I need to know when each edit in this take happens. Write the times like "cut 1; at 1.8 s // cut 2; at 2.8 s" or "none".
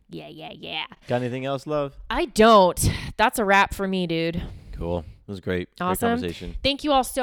none